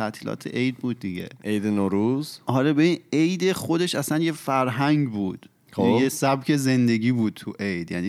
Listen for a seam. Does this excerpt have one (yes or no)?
no